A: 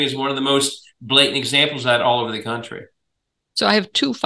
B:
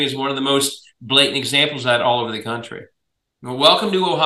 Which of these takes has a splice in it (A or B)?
B